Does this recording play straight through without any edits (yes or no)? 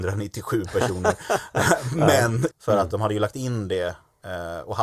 no